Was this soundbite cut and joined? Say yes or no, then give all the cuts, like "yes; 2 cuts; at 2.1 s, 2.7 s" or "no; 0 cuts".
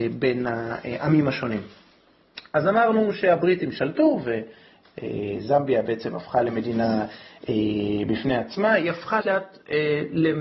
yes; 1 cut; at 9.2 s